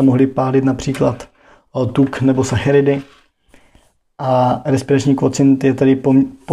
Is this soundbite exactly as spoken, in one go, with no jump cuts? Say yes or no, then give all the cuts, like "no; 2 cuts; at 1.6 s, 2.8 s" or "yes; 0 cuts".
yes; 0 cuts